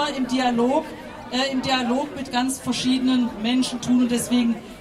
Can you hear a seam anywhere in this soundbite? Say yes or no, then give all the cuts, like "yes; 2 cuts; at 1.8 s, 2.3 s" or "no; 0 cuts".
no; 0 cuts